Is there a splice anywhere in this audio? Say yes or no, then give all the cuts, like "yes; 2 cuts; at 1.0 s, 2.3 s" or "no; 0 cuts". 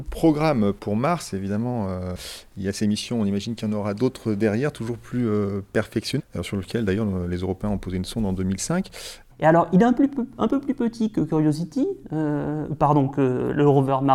yes; 2 cuts; at 6.2 s, 9.3 s